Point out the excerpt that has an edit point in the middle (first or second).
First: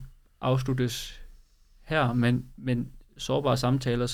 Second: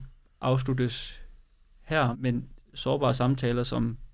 second